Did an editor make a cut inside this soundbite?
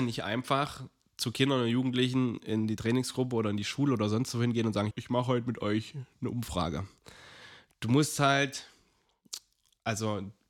yes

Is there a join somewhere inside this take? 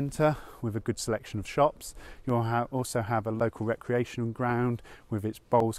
no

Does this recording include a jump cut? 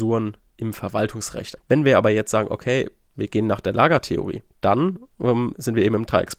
yes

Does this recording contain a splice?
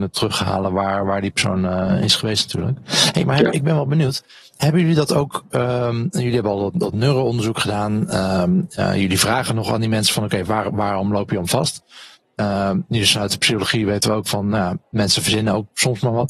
no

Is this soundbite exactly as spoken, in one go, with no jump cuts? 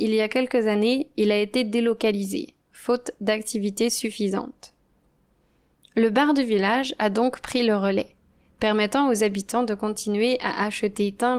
yes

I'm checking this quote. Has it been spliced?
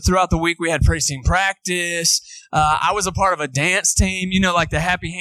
no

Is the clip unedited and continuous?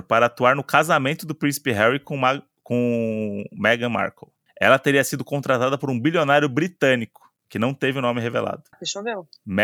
no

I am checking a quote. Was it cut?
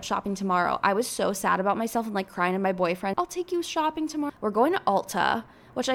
yes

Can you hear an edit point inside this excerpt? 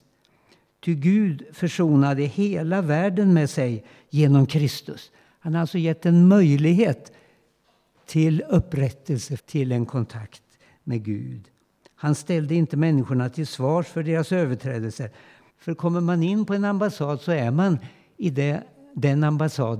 yes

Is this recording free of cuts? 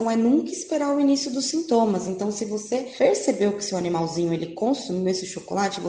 yes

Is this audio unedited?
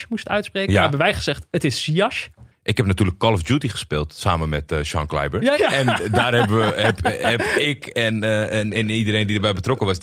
no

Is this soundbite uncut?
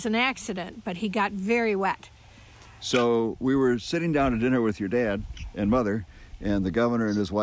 yes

